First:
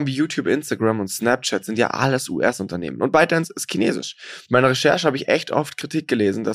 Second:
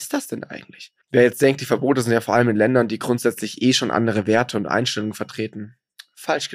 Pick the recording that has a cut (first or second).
second